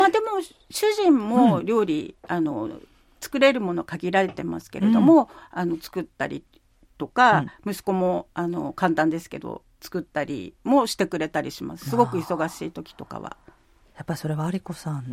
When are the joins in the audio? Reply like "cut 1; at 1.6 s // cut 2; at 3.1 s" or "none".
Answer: none